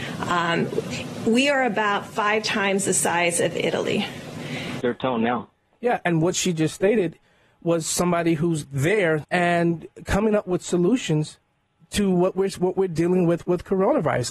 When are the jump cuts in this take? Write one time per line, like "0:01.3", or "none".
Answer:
0:04.8
0:09.2